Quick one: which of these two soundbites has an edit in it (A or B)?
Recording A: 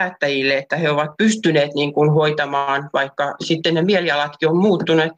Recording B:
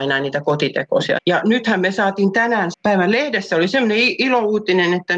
B